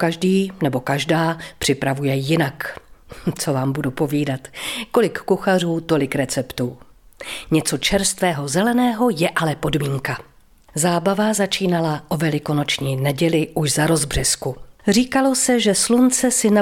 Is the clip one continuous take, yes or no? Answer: yes